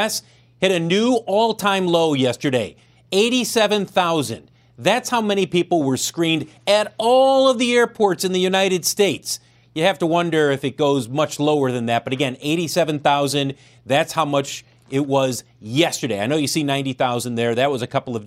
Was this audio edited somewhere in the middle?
no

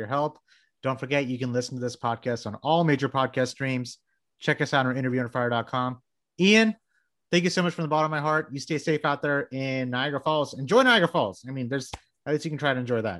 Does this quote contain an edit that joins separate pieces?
no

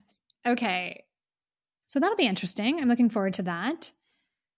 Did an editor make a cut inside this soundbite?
yes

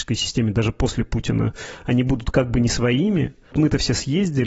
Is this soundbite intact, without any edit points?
no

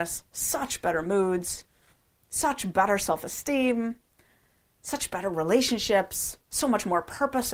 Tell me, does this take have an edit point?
no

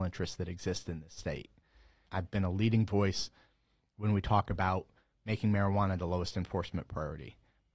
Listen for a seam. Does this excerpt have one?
yes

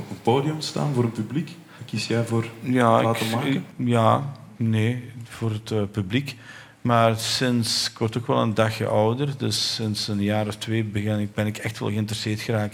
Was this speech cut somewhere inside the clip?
yes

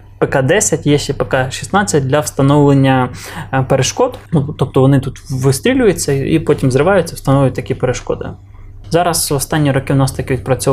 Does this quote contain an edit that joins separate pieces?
yes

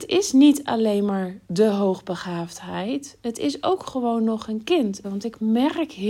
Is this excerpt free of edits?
no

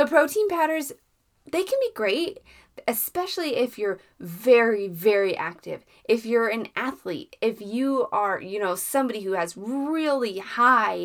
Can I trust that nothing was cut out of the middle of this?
yes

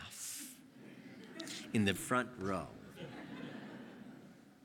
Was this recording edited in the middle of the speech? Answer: yes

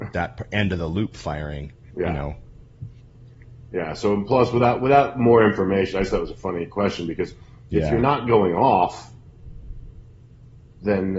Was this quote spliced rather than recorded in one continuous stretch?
yes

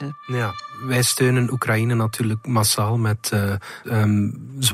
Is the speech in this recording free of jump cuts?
no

